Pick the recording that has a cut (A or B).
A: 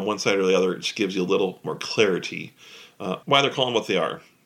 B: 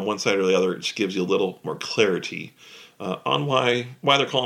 A